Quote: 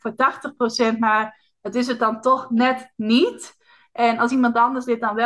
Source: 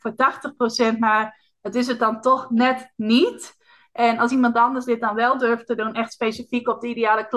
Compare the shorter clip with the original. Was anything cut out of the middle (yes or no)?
no